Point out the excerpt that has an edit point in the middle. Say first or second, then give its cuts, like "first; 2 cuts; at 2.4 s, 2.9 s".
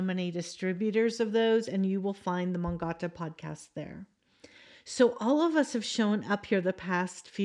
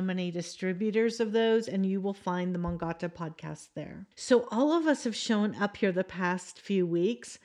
second; 1 cut; at 4.1 s